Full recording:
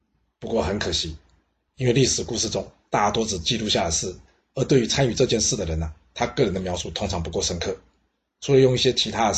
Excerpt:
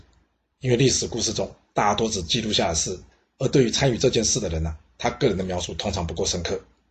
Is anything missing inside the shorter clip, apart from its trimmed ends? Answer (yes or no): no